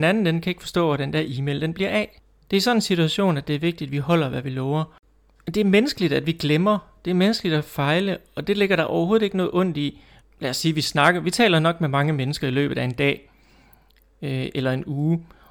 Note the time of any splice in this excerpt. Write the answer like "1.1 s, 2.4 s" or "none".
10.2 s